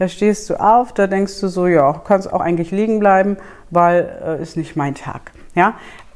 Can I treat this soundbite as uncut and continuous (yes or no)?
yes